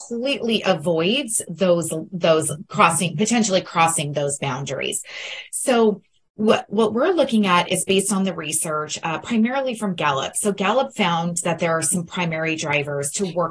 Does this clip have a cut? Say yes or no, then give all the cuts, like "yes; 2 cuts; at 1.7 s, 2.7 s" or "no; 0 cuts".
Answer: no; 0 cuts